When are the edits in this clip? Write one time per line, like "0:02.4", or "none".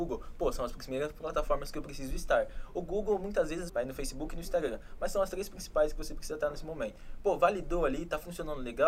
0:03.7